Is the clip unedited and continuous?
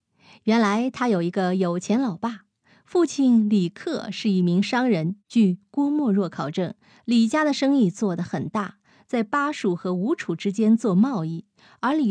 no; 1 cut; at 5.2 s

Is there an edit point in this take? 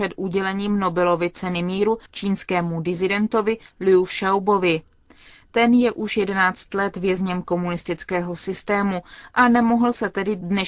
no; 0 cuts

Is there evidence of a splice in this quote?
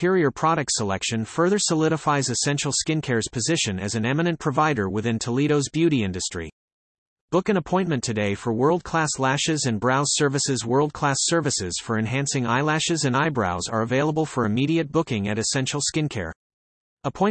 no; 0 cuts

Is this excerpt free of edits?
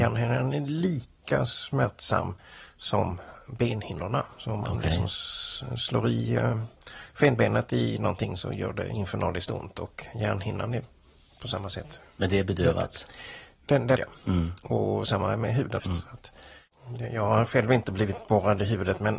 no; 2 cuts; at 14.0 s, 15.8 s

